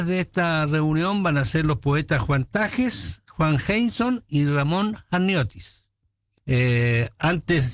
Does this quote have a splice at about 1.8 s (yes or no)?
no